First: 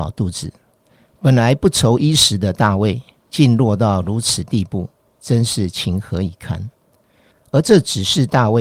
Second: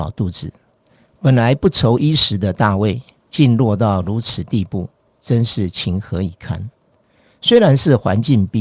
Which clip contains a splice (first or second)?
first